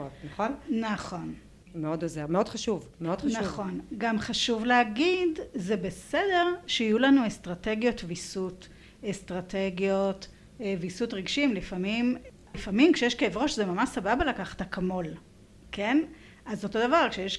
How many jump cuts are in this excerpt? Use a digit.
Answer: 0